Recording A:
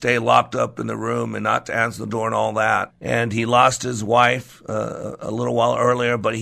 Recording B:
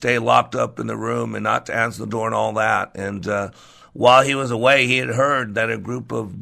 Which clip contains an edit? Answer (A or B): A